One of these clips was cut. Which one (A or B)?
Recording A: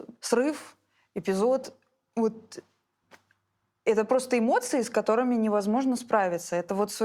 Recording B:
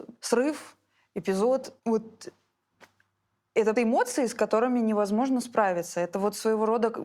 B